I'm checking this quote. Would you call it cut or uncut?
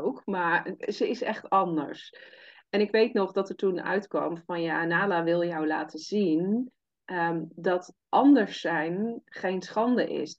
uncut